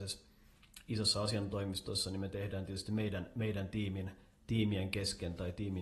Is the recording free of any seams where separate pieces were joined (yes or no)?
yes